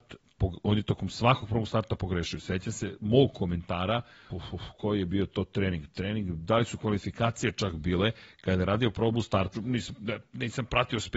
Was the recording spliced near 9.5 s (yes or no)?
yes